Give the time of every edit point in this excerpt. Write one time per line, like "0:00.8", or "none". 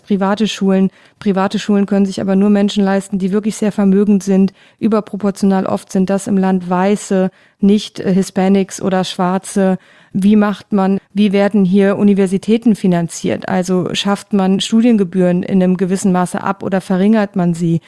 0:11.0